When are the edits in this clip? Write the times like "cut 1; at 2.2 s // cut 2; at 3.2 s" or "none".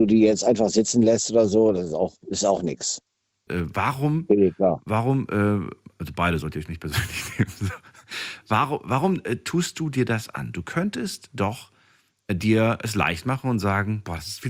cut 1; at 3.5 s